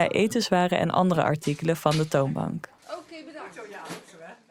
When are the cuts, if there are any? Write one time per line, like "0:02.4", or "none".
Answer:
none